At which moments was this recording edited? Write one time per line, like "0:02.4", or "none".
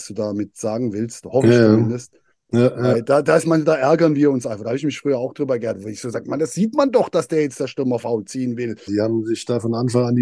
0:08.9

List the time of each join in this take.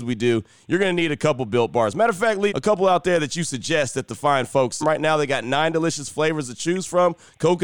0:02.5
0:04.8

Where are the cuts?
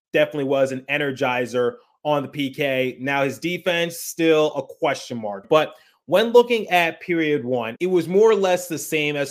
0:05.4

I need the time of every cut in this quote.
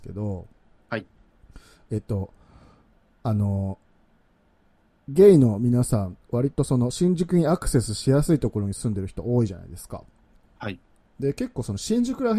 none

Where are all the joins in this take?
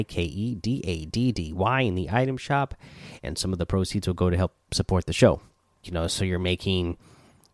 0:05.8

